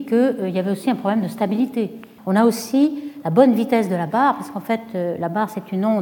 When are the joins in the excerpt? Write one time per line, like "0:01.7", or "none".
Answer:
0:02.2